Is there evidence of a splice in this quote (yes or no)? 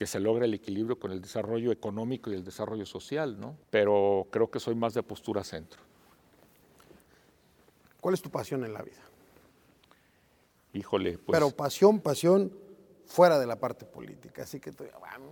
yes